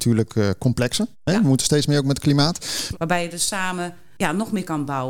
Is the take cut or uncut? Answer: cut